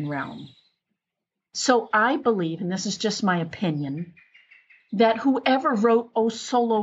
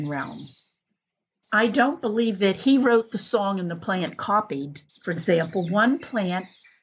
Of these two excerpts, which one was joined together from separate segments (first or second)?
second